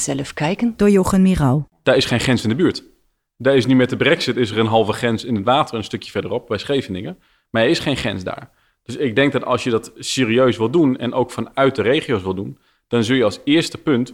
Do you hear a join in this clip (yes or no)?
yes